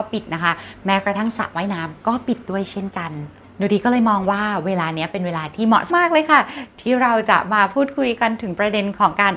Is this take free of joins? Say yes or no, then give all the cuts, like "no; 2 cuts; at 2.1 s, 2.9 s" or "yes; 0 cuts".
no; 1 cut; at 5.9 s